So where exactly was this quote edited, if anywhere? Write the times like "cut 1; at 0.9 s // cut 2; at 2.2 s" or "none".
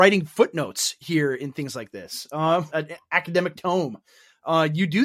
cut 1; at 2.7 s